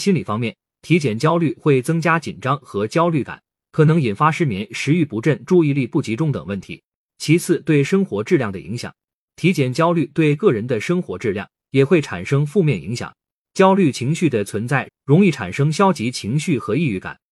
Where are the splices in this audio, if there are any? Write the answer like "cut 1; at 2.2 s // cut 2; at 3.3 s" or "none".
cut 1; at 14.9 s

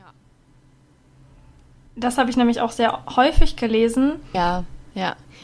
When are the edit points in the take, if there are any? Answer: cut 1; at 1.9 s // cut 2; at 4.3 s

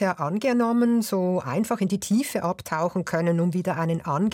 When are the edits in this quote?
none

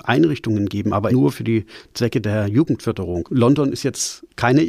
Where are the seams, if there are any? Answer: cut 1; at 1.1 s // cut 2; at 3.2 s

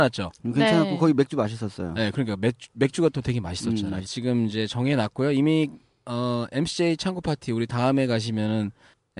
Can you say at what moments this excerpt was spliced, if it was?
cut 1; at 4.1 s

